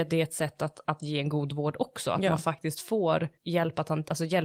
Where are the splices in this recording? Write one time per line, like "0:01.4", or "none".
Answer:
0:03.4

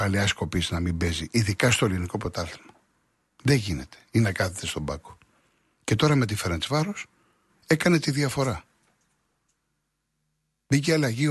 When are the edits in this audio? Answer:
0:07.5

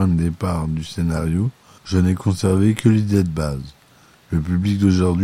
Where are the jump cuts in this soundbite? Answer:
0:01.8

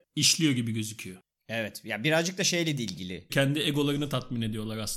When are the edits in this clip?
0:03.3

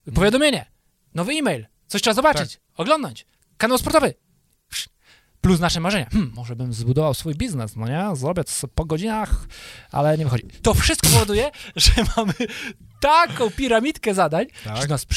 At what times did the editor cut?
none

